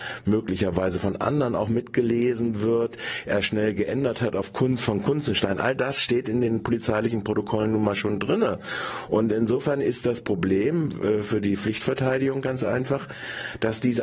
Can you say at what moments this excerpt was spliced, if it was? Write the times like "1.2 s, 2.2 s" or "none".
none